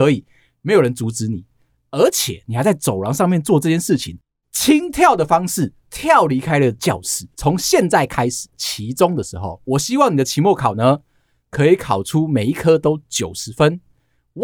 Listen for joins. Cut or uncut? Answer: cut